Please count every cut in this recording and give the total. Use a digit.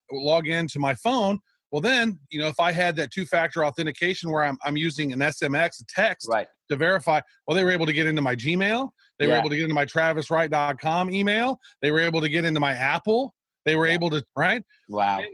1